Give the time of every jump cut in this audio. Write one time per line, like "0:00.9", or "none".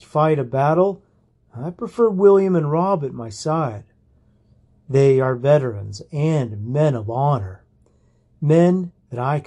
none